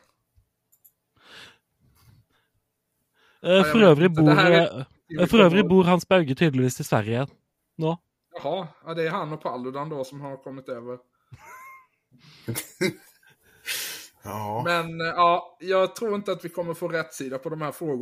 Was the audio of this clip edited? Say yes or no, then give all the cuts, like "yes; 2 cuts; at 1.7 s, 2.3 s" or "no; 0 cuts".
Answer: no; 0 cuts